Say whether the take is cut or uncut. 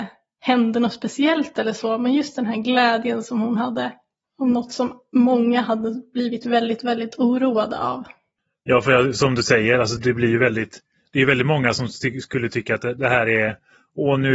cut